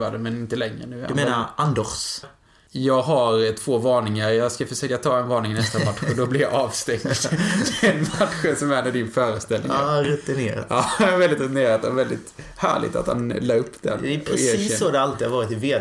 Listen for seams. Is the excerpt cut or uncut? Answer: cut